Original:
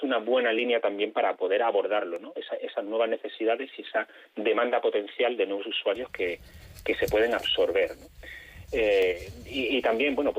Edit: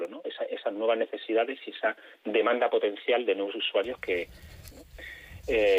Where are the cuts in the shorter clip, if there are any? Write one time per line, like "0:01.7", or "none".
0:04.7